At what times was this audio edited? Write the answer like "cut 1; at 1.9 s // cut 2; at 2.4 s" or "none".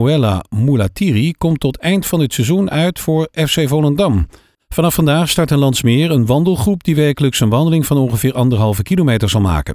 cut 1; at 4.6 s